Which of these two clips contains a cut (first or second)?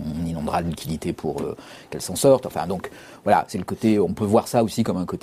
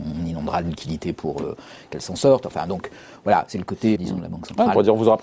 second